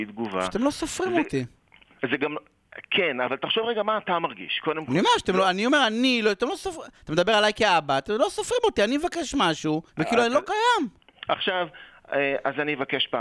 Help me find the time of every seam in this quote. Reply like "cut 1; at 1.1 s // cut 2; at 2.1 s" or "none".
cut 1; at 9.9 s // cut 2; at 11.3 s